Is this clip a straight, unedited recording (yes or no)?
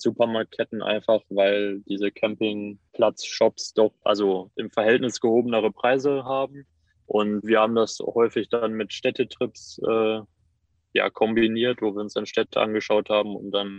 no